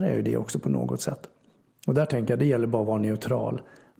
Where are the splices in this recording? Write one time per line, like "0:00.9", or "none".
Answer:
none